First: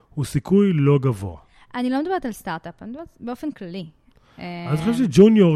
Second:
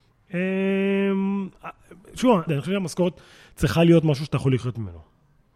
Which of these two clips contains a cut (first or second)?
second